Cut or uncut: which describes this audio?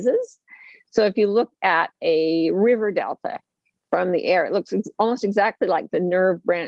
uncut